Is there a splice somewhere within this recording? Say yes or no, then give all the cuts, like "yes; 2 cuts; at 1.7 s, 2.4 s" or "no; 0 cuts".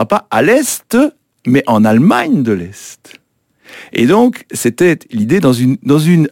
no; 0 cuts